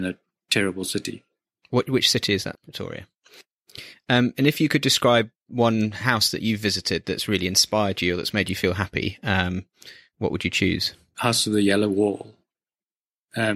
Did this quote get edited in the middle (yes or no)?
yes